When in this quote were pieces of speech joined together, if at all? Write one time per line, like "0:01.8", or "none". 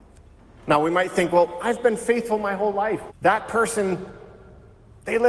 0:03.1